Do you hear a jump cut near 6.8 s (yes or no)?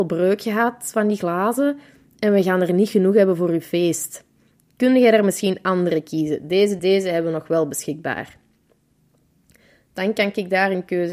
yes